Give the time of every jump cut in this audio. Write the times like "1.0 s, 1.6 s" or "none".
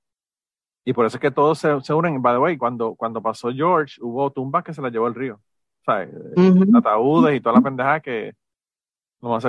none